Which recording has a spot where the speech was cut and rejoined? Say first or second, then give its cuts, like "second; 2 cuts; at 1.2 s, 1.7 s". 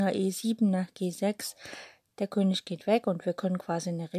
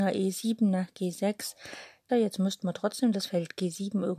second; 1 cut; at 2.1 s